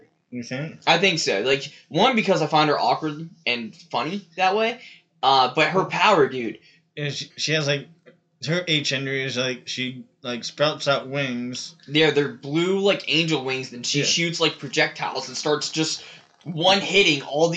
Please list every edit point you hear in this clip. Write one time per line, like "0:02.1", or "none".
0:07.3

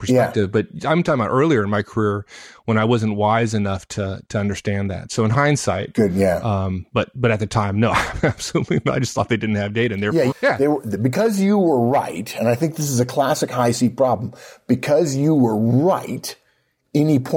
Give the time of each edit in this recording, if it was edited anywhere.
0:10.3

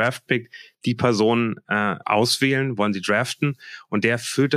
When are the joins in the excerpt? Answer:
0:02.0

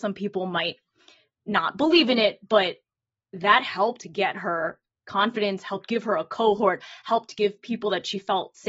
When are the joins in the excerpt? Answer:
none

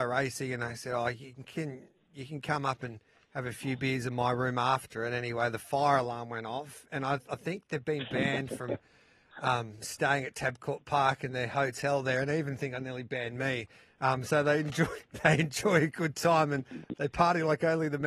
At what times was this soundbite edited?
none

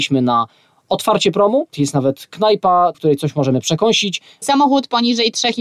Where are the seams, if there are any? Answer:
0:01.7
0:02.9
0:04.4

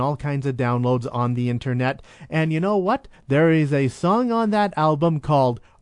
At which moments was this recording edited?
0:03.1

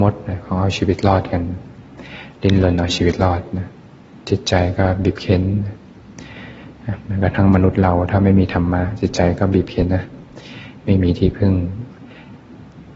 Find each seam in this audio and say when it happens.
0:09.9

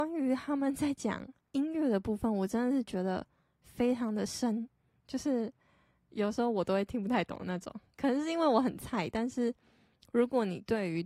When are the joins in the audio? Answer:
none

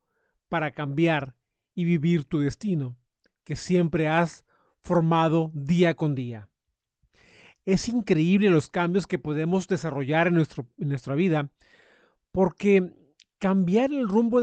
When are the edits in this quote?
none

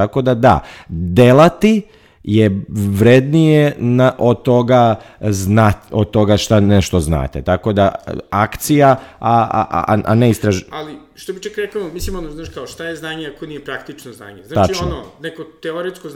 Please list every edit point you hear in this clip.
none

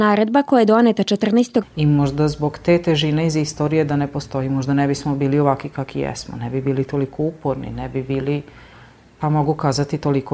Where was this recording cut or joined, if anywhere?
0:01.6

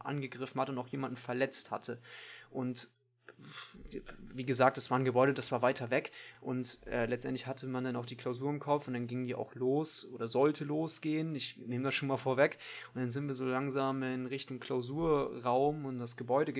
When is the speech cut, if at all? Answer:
none

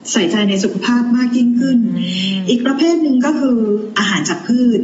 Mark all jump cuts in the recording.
none

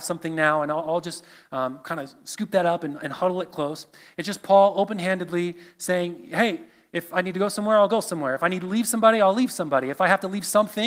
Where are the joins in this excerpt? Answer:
none

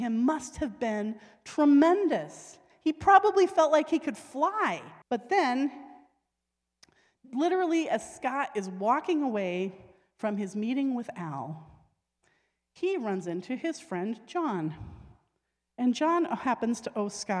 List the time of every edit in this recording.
0:05.0

